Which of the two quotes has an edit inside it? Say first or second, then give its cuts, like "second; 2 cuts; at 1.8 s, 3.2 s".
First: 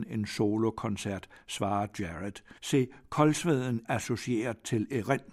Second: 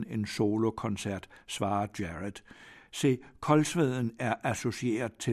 first; 2 cuts; at 2.6 s, 3.8 s